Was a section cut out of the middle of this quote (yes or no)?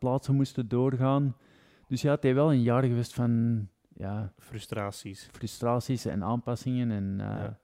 no